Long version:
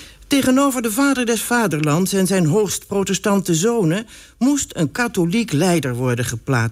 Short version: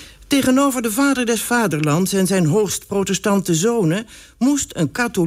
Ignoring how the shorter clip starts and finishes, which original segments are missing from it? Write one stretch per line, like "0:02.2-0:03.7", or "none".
none